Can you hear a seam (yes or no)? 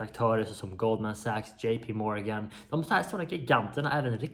no